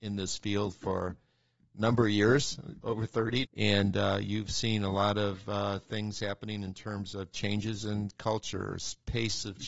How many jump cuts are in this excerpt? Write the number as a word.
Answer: one